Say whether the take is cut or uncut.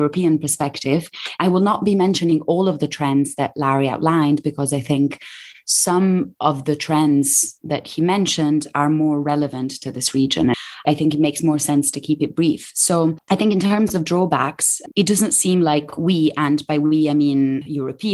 cut